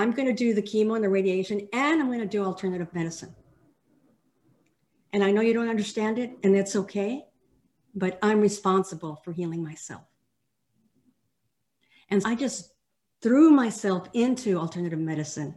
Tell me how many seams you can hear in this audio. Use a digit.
1